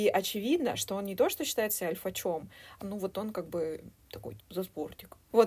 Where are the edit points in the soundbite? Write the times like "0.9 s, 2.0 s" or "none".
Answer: 2.8 s, 4.4 s